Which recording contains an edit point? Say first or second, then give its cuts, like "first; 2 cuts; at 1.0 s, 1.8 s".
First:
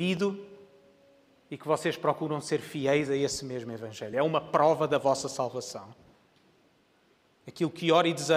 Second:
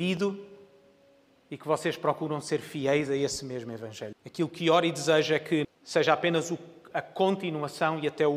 second; 2 cuts; at 4.1 s, 5.6 s